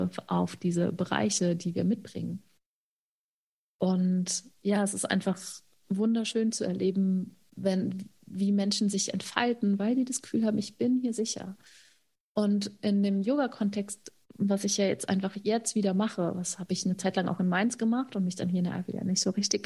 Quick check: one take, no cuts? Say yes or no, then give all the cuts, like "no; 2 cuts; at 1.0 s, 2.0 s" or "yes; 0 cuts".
yes; 0 cuts